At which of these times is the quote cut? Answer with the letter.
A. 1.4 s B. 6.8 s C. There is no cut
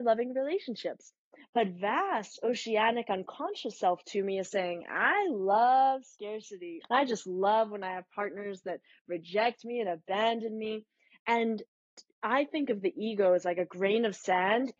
B